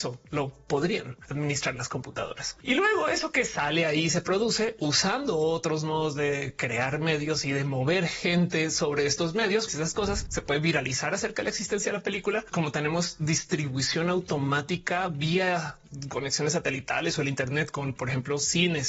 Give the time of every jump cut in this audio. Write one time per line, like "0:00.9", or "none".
0:02.6
0:09.7
0:12.5